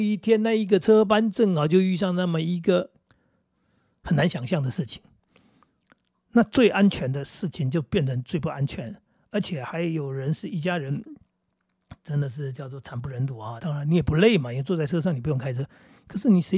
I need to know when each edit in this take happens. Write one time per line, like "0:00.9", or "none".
0:13.6